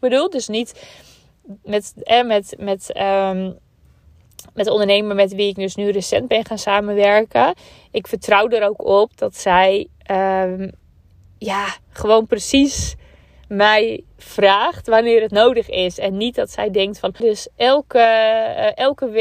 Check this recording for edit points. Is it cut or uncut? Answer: cut